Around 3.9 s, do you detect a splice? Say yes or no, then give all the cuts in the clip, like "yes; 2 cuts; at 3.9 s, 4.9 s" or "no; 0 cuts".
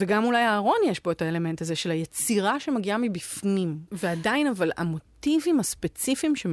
yes; 1 cut; at 3.9 s